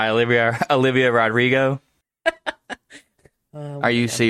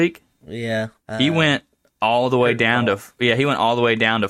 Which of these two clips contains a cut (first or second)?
second